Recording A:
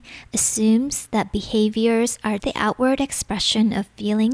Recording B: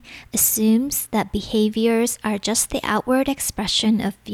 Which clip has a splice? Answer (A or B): A